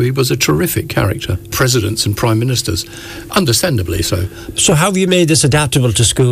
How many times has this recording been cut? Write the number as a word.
two